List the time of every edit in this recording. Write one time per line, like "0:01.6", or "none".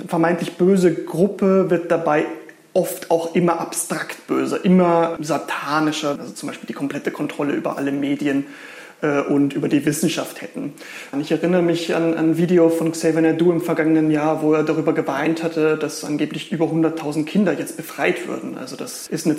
0:06.2
0:11.1